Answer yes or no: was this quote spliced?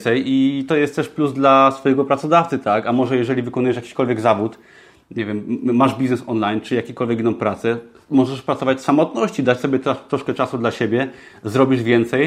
no